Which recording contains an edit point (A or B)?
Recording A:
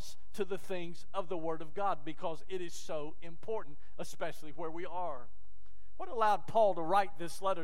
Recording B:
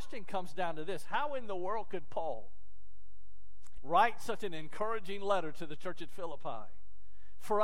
B